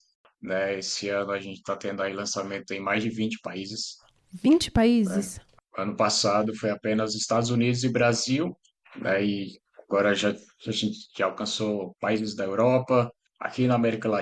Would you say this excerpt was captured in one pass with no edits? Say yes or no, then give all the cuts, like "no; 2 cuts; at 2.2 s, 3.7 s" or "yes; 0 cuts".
yes; 0 cuts